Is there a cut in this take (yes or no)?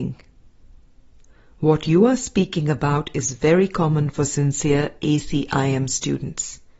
no